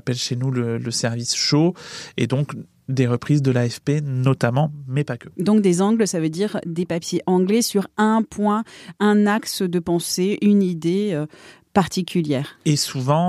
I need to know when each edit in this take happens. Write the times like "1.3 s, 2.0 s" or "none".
none